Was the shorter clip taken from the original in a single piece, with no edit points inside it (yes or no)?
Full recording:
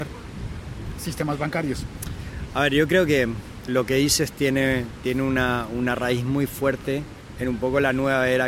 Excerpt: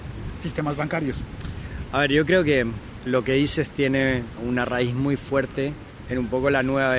no